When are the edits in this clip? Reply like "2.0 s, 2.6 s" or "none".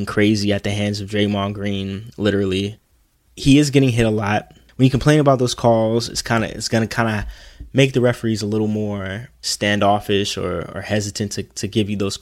none